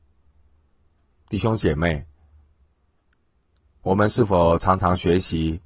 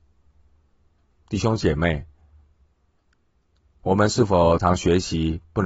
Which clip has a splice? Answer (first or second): second